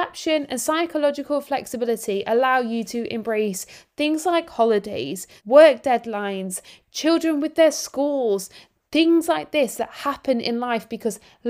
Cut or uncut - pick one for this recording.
cut